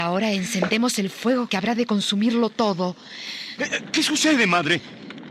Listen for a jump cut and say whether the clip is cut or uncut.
cut